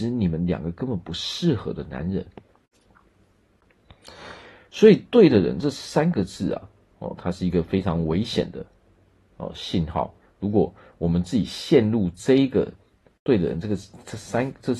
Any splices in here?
no; 0 cuts

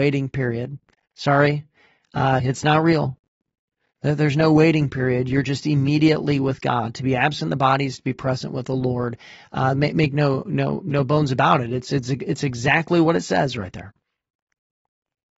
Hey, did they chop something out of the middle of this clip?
yes; 1 cut; at 2.4 s

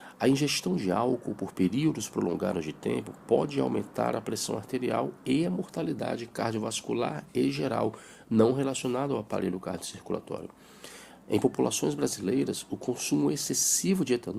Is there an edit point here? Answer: no; 0 cuts

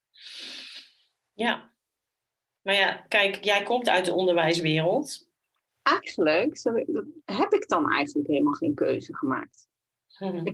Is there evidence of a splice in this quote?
yes; 3 cuts; at 3.4 s, 5.7 s, 7.2 s

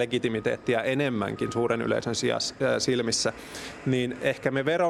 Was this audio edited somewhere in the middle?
no; 0 cuts

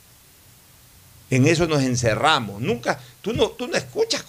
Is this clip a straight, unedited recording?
yes; 0 cuts

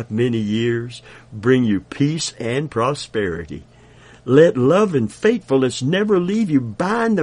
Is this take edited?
no; 0 cuts

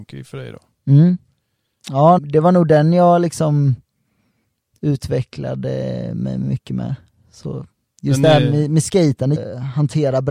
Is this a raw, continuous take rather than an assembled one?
no; 2 cuts; at 2.2 s, 9.4 s

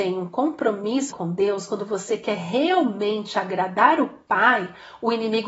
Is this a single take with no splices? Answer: no; 1 cut; at 1.1 s

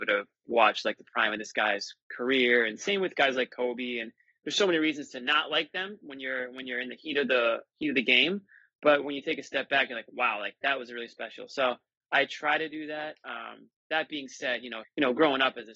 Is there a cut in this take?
yes; 1 cut; at 14.8 s

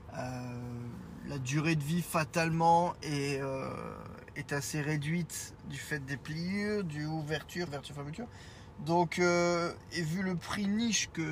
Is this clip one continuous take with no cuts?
no; 1 cut; at 7.7 s

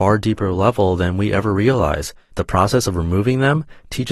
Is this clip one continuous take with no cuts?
no; 1 cut; at 2.3 s

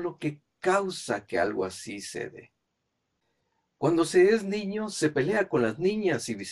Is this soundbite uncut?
yes; 0 cuts

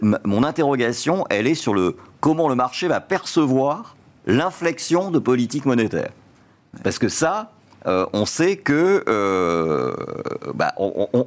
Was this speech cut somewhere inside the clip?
no; 0 cuts

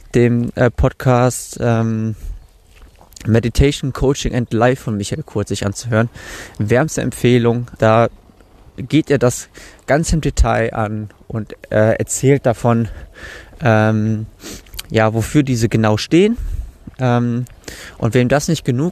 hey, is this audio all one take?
no; 1 cut; at 7.8 s

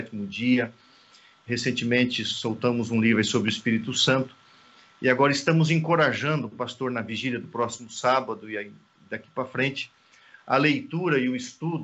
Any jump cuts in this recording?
no; 0 cuts

